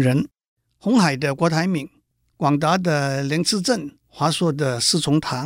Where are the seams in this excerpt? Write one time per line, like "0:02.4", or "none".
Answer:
0:02.3
0:04.0